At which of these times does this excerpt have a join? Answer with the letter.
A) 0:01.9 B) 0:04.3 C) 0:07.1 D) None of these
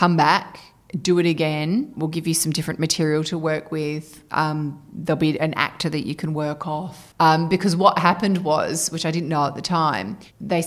C